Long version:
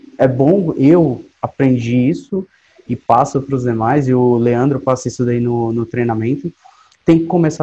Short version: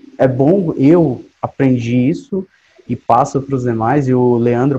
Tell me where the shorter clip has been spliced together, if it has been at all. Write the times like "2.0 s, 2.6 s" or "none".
none